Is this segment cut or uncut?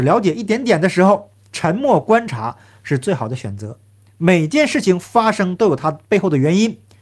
uncut